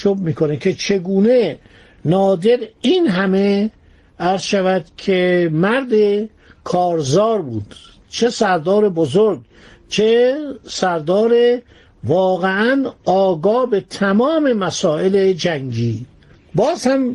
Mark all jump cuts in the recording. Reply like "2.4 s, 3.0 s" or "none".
none